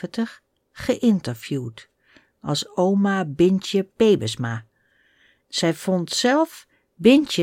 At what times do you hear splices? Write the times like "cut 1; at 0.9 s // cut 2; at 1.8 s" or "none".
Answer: cut 1; at 5.4 s